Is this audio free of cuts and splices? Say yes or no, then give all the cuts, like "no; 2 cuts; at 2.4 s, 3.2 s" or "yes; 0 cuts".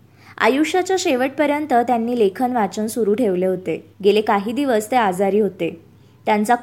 no; 1 cut; at 3.9 s